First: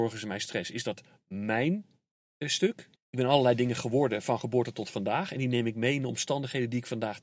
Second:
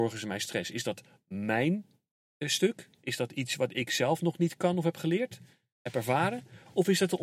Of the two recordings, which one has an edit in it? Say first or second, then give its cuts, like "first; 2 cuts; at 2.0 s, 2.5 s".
first; 1 cut; at 3.0 s